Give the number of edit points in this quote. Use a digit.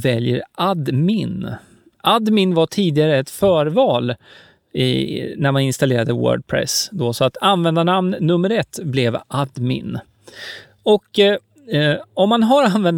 0